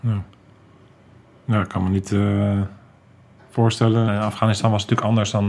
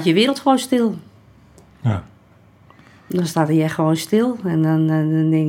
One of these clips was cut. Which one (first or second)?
first